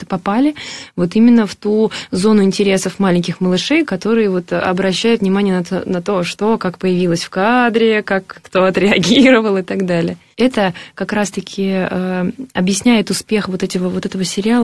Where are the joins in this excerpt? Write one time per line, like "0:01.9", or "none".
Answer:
0:10.3